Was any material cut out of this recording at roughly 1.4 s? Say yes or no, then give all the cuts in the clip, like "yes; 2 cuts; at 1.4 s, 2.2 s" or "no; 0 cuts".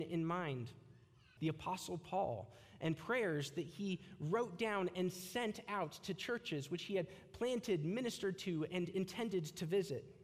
yes; 1 cut; at 1.4 s